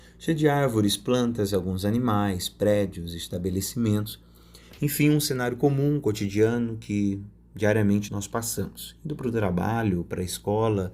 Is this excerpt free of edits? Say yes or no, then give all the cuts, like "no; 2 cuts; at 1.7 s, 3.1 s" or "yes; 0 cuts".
no; 1 cut; at 8.1 s